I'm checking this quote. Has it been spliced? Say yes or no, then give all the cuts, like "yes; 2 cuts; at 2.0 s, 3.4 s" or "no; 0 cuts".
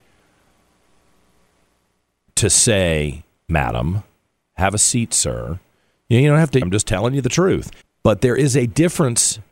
yes; 3 cuts; at 3.4 s, 6.6 s, 7.8 s